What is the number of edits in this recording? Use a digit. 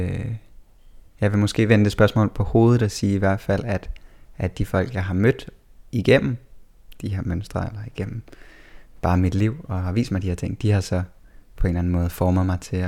0